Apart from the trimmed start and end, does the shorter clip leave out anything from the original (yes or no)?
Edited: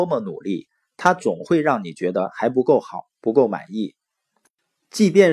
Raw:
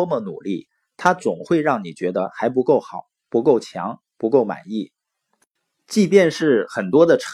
yes